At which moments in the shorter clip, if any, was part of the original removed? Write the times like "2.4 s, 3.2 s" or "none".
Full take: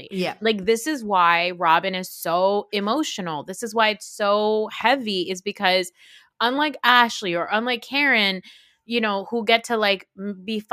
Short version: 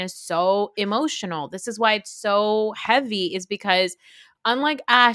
none

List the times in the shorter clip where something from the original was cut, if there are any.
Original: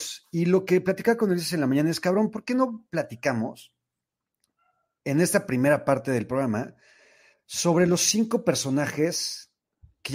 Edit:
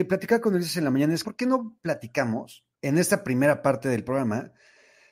1.2 s, 2.7 s

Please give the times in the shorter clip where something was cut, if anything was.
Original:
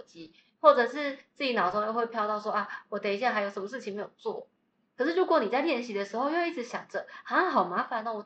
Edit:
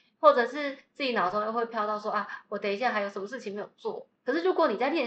4.2 s

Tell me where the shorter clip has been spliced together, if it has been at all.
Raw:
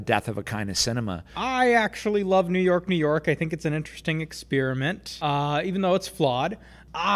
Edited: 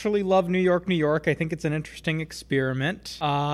none

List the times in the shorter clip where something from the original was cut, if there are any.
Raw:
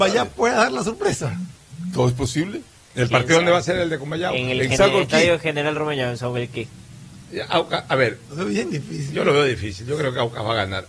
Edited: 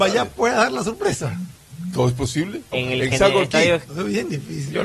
2.7 s, 3.8 s

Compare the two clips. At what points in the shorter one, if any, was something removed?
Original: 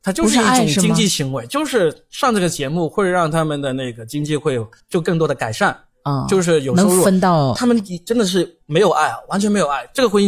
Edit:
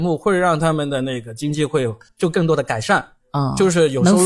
none

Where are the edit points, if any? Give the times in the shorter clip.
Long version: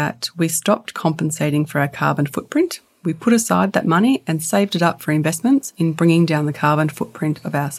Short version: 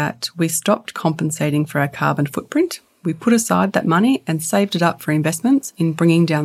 none

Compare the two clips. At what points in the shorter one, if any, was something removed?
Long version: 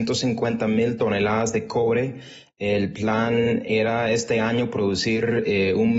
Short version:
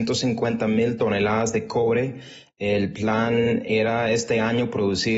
none

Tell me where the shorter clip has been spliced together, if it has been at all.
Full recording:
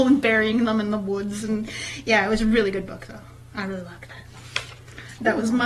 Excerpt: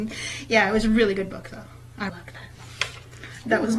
2.1 s

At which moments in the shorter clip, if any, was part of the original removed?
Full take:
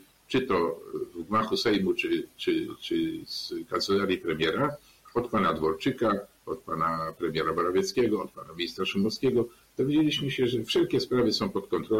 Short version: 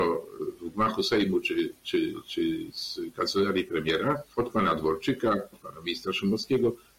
4.3 s, 5.5 s

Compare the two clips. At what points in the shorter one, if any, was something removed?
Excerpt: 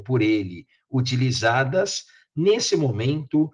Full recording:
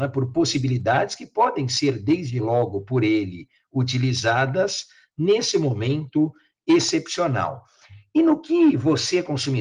none

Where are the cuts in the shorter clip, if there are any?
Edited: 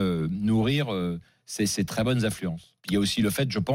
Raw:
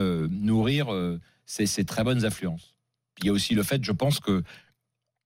2.8 s

